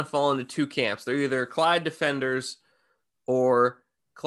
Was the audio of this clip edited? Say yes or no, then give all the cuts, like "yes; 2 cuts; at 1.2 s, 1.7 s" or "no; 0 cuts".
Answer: no; 0 cuts